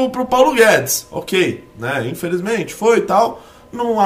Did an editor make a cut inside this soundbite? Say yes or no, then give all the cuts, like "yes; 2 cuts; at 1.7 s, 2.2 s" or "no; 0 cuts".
no; 0 cuts